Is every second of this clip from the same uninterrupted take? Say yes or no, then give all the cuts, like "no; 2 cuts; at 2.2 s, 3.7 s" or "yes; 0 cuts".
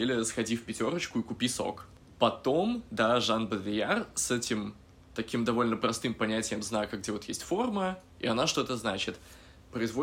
yes; 0 cuts